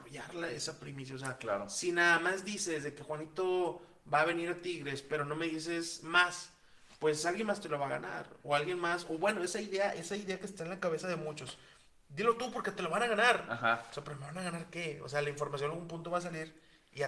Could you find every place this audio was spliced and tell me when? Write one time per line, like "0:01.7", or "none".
none